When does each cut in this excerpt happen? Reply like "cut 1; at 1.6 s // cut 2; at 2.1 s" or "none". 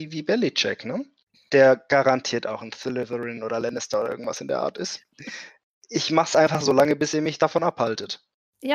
cut 1; at 5.1 s

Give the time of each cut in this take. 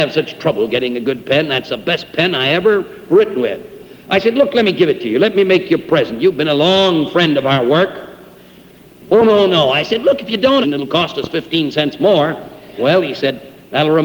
cut 1; at 10.6 s // cut 2; at 12.8 s

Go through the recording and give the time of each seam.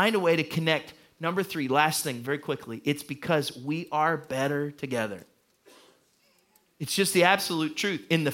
none

